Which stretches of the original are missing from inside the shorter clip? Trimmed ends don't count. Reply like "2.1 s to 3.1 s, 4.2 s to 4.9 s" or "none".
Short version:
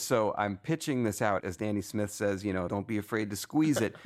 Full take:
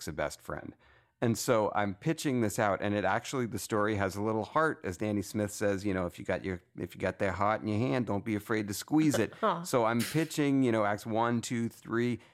2.8 s to 4.8 s, 6.1 s to 8.1 s